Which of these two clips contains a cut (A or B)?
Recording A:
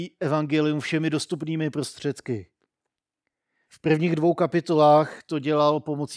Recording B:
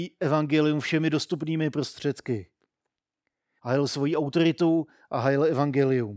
B